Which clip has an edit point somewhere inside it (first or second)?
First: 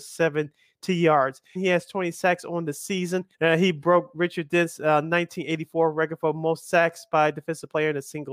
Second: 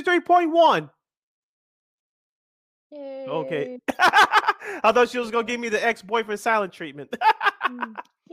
first